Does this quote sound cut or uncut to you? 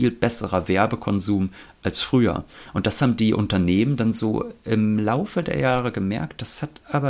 uncut